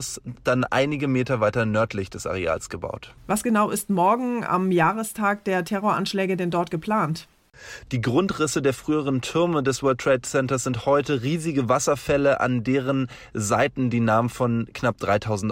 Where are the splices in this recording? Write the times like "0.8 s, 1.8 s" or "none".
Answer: 3.2 s, 7.9 s